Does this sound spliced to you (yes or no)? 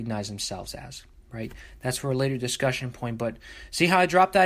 no